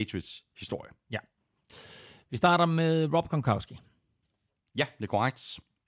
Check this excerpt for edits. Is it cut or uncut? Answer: uncut